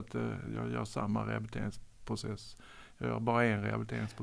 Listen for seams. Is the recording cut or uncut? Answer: uncut